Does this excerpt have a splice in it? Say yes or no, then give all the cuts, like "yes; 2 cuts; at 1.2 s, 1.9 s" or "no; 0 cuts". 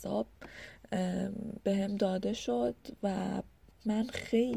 no; 0 cuts